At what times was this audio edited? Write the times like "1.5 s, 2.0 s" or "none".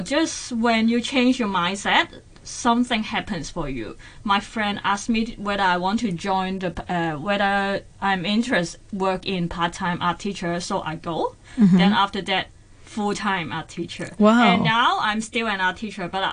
none